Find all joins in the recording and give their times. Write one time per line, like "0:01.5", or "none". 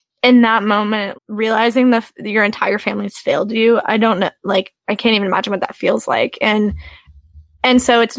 0:01.1
0:04.8